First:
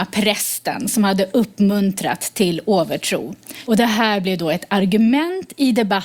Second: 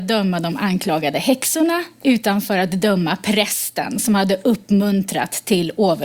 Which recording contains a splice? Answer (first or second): first